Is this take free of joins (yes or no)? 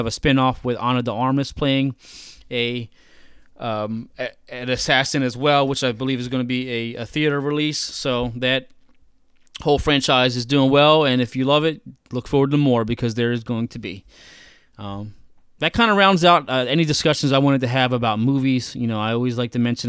yes